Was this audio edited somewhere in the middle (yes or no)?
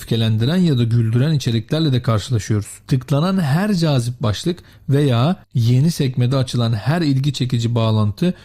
yes